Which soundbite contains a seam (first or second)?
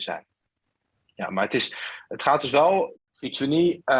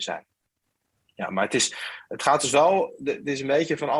first